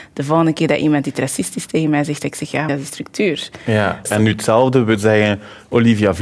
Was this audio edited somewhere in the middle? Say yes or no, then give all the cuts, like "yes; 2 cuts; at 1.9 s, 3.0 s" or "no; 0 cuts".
yes; 2 cuts; at 2.7 s, 4.1 s